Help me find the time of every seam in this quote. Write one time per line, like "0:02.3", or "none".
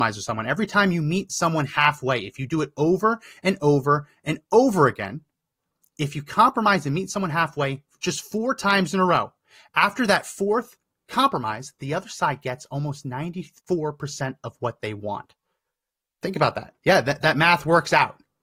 0:16.8